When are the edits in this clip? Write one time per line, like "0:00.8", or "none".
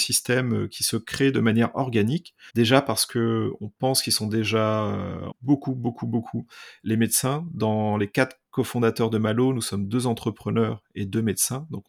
0:02.5
0:05.3